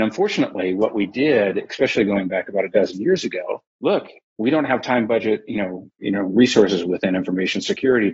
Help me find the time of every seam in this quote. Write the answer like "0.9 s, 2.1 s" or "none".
3.8 s